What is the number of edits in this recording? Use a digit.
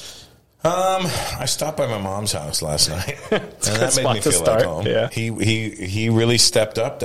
1